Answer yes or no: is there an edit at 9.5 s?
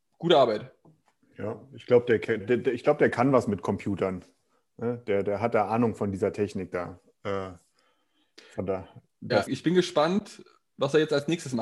yes